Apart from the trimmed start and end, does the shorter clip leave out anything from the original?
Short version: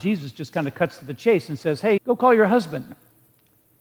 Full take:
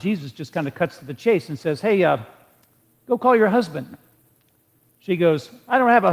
yes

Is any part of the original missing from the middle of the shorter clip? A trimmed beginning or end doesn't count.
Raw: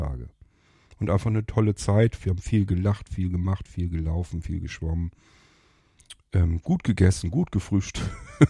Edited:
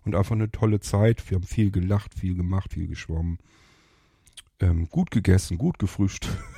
yes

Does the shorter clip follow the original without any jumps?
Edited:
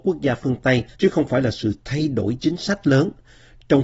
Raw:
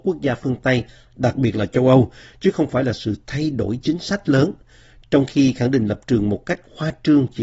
no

